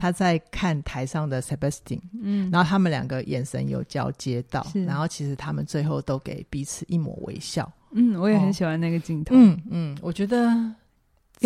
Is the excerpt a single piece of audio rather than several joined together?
yes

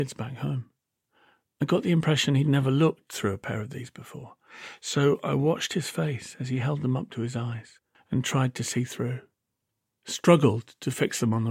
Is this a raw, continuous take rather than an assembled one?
no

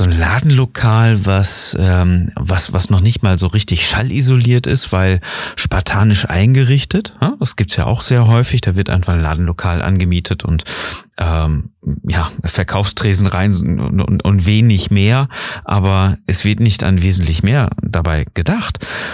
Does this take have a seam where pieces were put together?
no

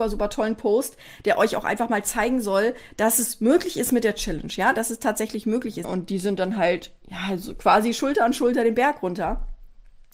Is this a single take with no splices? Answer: no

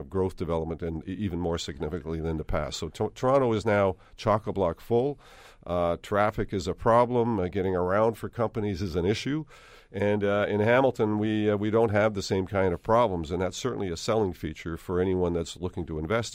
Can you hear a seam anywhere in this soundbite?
yes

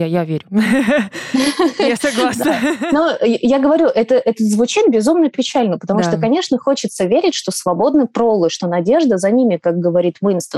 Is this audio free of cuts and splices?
yes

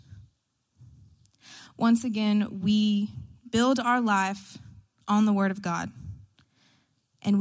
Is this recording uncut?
yes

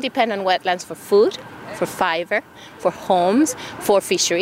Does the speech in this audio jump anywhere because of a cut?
no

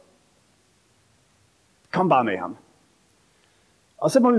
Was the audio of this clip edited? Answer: no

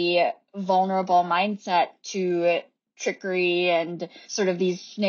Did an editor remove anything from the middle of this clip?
yes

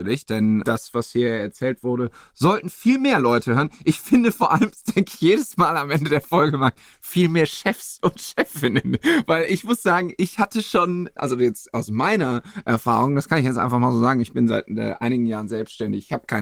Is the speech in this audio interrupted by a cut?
no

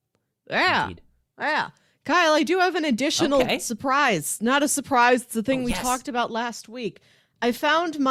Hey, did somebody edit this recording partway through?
no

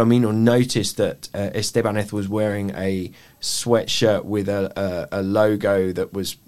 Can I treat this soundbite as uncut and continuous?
yes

